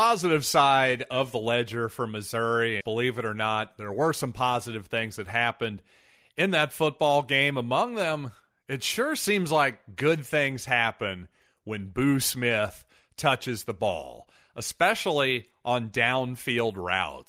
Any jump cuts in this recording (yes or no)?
yes